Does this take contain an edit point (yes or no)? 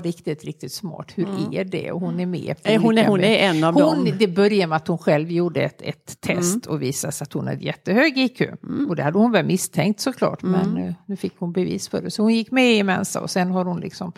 no